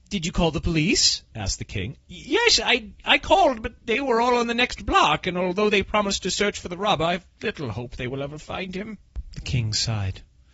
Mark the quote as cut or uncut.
uncut